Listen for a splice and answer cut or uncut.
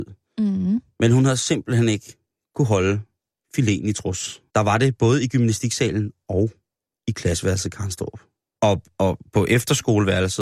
cut